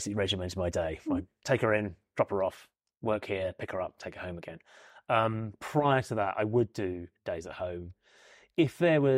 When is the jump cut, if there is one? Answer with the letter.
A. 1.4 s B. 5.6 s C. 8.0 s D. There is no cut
A